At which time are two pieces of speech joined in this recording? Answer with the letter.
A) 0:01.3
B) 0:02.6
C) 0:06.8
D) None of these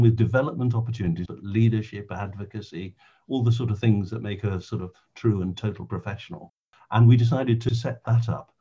A